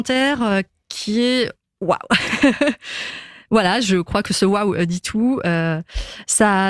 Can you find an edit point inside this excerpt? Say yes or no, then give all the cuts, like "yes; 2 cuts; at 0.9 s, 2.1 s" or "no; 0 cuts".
no; 0 cuts